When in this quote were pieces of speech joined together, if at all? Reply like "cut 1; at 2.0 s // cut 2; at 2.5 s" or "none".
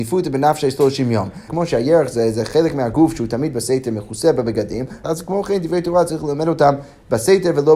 cut 1; at 1.5 s // cut 2; at 5.0 s

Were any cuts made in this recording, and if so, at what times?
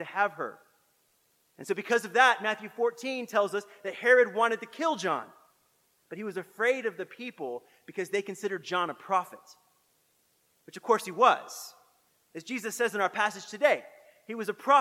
none

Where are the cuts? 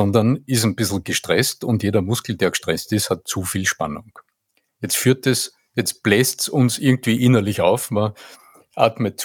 none

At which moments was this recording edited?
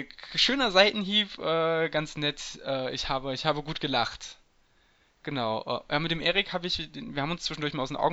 none

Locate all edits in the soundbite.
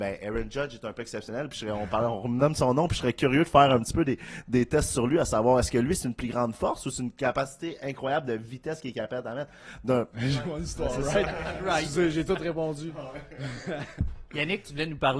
cut 1; at 10.1 s

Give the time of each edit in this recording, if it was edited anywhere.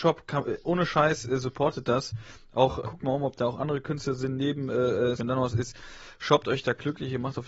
cut 1; at 2.8 s // cut 2; at 5.2 s

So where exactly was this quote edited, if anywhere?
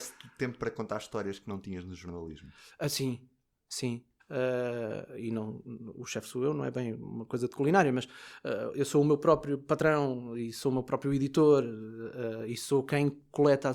cut 1; at 4.2 s

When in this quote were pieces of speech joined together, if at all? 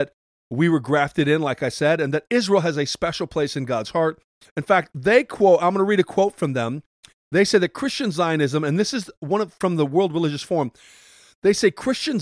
cut 1; at 4.5 s

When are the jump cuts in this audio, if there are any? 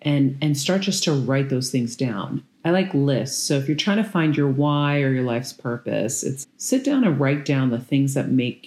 cut 1; at 2.5 s // cut 2; at 6.4 s

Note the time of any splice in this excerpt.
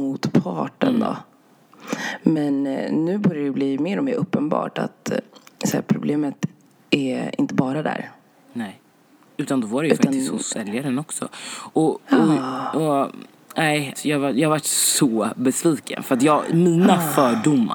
cut 1; at 13.9 s

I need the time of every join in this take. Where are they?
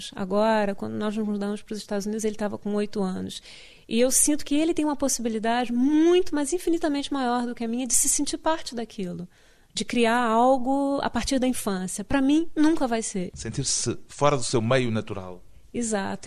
cut 1; at 13.3 s

